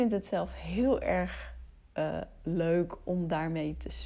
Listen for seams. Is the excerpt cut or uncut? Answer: uncut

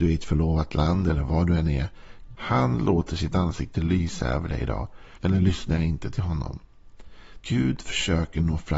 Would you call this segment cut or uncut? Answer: cut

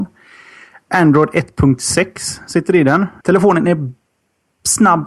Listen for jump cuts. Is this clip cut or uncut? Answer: cut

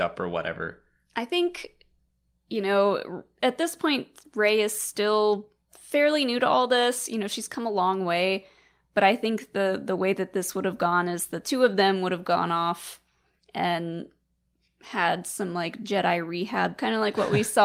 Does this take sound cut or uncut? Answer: uncut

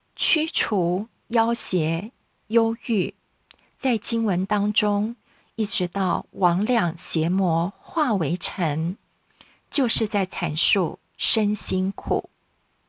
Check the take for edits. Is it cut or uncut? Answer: cut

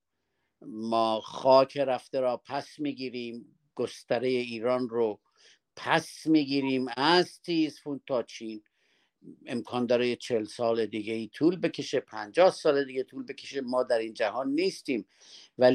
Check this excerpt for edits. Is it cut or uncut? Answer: uncut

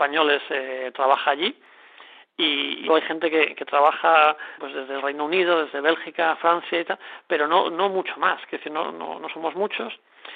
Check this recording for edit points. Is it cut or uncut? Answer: cut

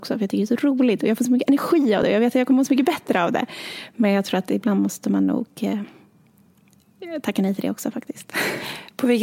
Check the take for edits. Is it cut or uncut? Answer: uncut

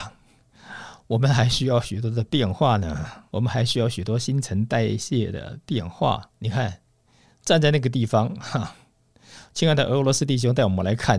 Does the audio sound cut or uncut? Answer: cut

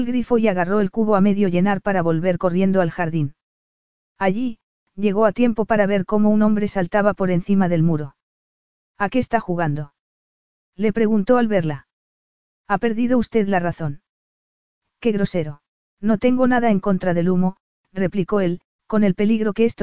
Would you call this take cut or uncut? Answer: cut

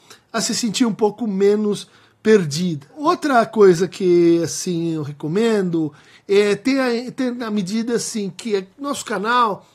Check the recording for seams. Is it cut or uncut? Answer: uncut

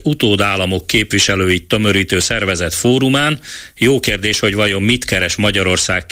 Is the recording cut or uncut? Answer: uncut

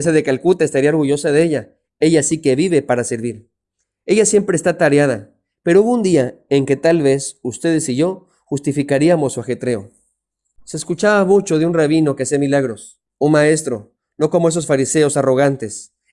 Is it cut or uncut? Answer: cut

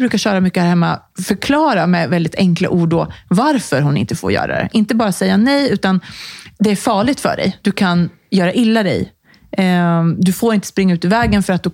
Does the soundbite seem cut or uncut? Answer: uncut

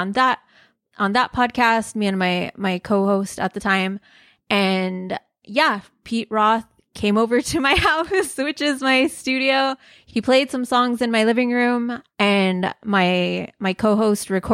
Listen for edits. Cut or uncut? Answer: uncut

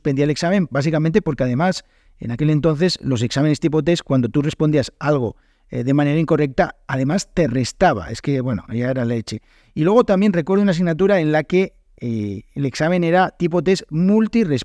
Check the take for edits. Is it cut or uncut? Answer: uncut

